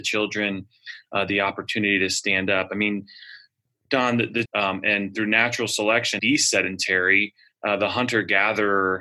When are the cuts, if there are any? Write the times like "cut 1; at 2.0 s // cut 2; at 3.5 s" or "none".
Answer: cut 1; at 4.5 s // cut 2; at 6.2 s